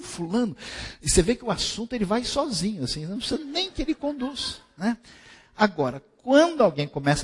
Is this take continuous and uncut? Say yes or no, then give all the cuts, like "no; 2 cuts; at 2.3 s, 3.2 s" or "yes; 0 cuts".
yes; 0 cuts